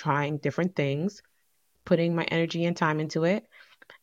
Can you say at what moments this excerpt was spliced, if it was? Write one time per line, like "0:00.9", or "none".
0:01.8